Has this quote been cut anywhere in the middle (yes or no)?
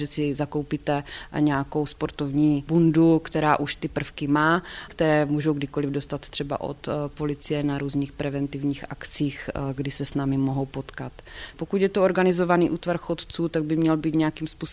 yes